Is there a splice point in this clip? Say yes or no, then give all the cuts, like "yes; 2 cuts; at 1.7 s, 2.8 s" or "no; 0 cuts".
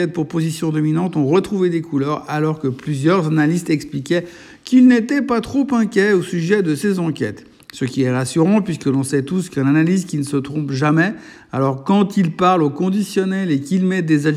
no; 0 cuts